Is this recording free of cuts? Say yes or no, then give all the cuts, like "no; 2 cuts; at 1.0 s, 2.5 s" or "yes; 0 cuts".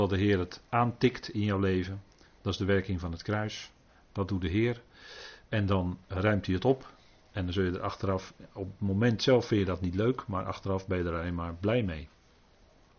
yes; 0 cuts